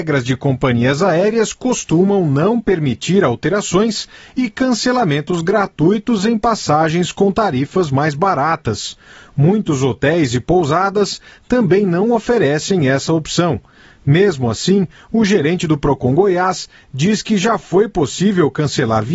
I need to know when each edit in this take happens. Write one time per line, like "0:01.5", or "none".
none